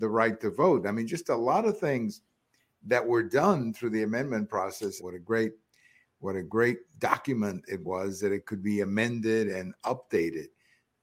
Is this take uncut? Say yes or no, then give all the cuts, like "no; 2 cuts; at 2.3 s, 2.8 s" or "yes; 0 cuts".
no; 1 cut; at 5.0 s